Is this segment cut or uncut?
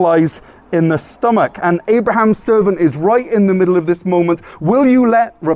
uncut